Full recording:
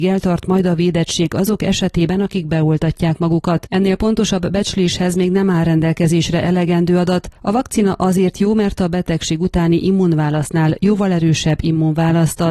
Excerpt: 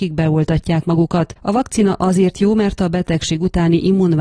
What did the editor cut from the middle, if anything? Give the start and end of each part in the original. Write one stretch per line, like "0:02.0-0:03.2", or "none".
0:03.7-0:07.4